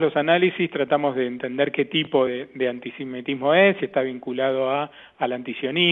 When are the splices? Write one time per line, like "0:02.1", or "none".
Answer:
none